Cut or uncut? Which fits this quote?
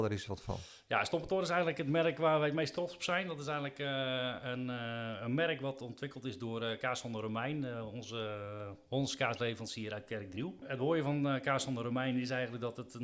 uncut